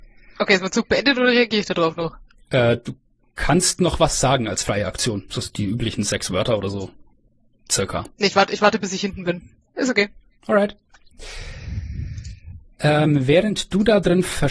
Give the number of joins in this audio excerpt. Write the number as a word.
zero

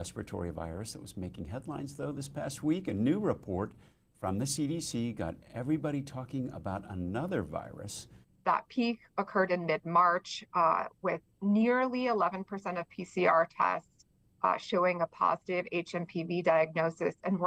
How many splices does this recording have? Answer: one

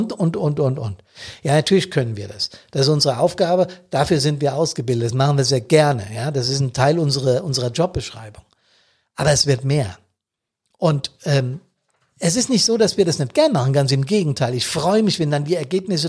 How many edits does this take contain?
zero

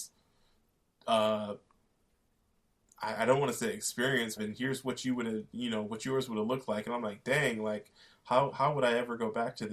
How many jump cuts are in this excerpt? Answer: one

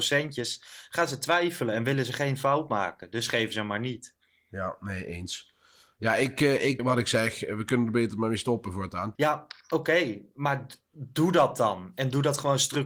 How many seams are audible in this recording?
two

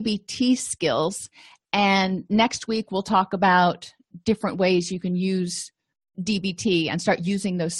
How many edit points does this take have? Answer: zero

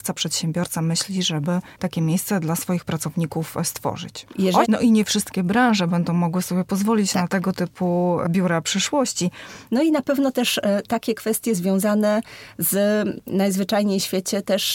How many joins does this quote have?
two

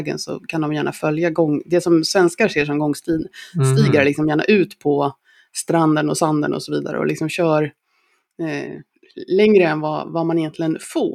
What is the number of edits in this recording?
zero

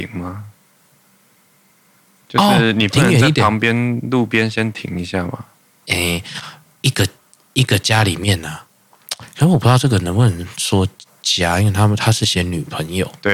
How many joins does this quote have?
one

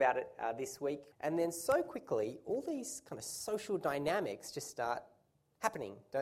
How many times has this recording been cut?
one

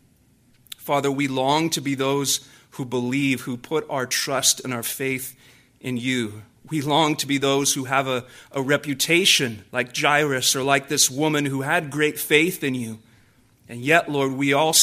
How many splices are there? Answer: one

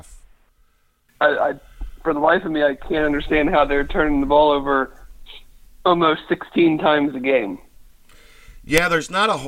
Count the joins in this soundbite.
one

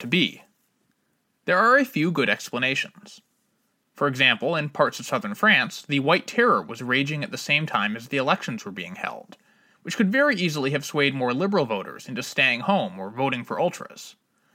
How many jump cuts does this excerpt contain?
zero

